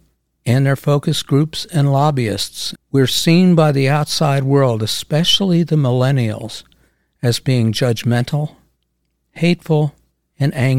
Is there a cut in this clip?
yes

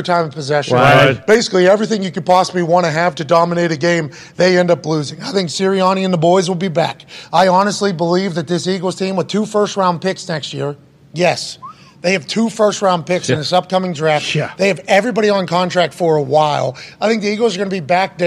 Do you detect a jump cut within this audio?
no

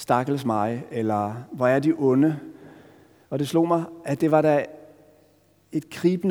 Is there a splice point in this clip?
yes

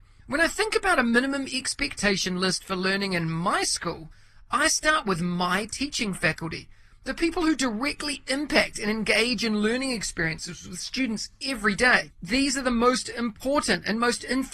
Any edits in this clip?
yes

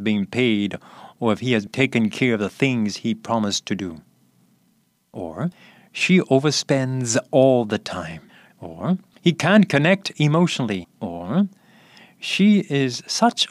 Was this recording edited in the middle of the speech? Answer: yes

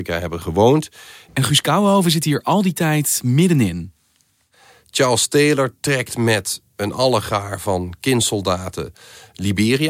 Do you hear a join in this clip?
yes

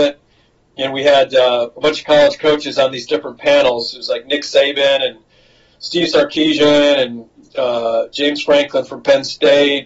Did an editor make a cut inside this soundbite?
no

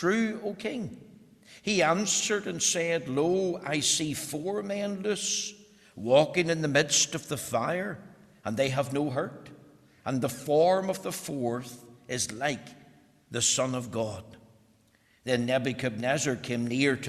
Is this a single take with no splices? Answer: yes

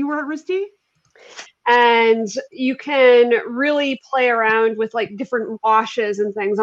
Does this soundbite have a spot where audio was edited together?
yes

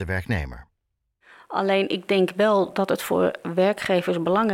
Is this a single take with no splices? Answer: yes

